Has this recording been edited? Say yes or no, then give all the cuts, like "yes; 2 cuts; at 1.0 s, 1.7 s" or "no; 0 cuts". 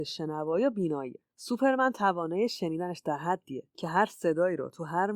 yes; 1 cut; at 1.3 s